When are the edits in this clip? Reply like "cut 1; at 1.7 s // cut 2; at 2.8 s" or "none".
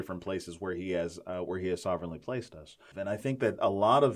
cut 1; at 2.9 s